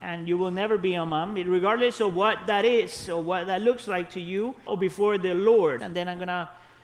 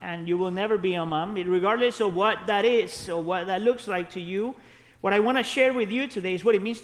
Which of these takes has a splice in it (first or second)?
first